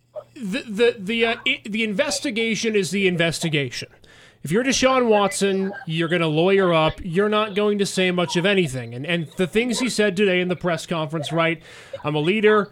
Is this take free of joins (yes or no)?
yes